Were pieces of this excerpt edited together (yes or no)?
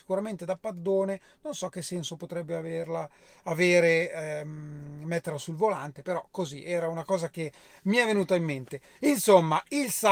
no